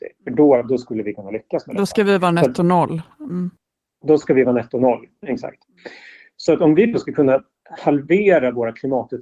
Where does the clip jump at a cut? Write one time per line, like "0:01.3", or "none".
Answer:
none